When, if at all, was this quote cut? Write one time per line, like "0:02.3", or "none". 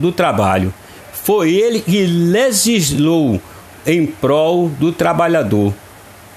none